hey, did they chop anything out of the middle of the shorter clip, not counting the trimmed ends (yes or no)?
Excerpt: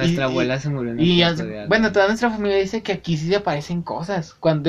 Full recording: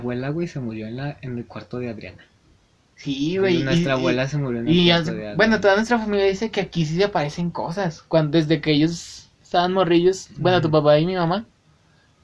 no